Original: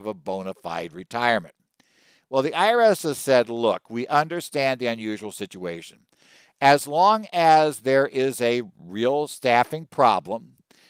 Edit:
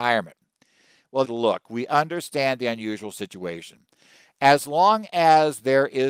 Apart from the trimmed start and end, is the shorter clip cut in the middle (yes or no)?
yes